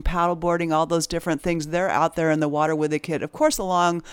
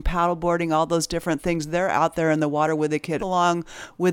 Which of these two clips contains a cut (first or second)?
second